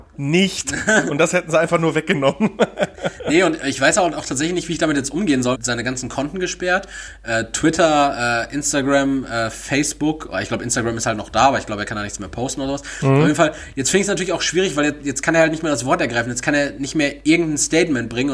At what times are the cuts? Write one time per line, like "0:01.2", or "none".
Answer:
0:05.5